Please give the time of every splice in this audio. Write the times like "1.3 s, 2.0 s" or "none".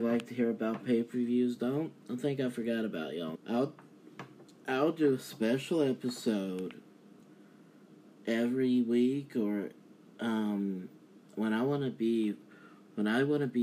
3.3 s